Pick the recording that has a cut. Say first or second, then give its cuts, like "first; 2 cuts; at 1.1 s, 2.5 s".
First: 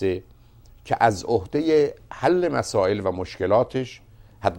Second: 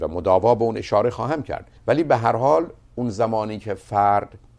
second; 1 cut; at 1.8 s